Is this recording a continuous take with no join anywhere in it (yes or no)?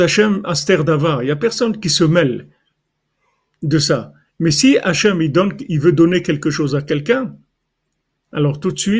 yes